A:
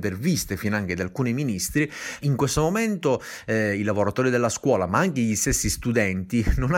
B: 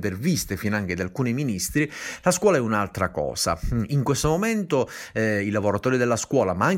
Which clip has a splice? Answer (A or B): A